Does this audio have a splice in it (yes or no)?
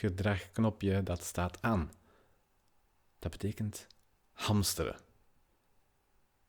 no